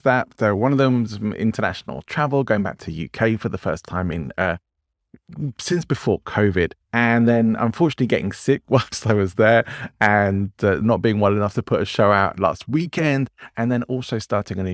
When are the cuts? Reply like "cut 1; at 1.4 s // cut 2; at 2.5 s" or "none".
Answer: cut 1; at 6.8 s // cut 2; at 10.8 s